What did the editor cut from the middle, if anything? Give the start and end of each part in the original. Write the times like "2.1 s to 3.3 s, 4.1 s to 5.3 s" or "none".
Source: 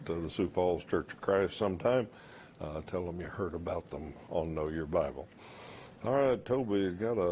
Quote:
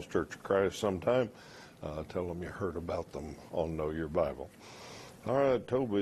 none